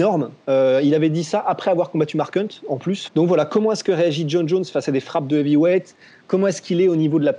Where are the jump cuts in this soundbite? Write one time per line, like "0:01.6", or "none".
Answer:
0:03.1